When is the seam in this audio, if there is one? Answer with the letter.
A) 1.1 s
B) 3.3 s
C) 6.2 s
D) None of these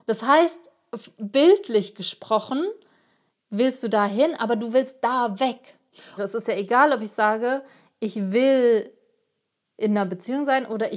C